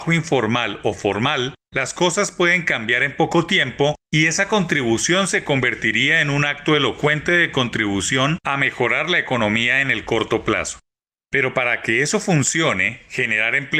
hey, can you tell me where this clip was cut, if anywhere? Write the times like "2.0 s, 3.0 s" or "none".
11.2 s